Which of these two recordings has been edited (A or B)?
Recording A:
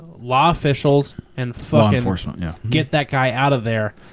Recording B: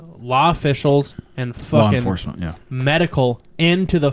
A